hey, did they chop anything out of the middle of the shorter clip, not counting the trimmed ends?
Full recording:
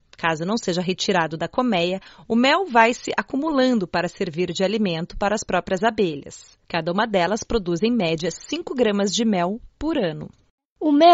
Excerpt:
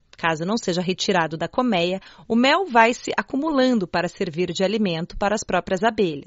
no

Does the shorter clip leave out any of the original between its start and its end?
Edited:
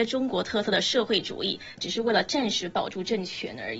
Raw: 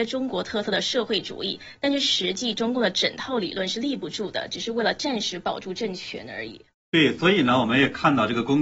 yes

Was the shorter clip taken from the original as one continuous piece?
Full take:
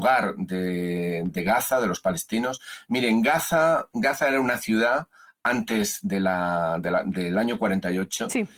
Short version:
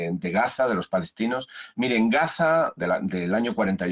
no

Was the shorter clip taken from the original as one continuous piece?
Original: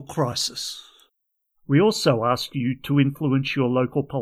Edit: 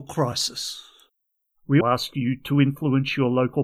no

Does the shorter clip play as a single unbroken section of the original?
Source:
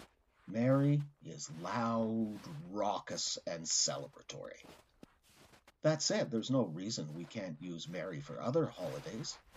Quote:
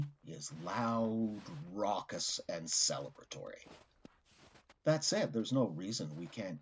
yes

